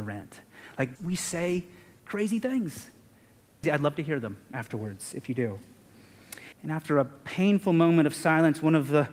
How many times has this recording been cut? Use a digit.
3